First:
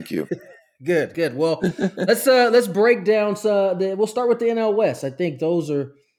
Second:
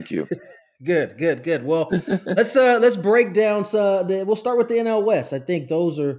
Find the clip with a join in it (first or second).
first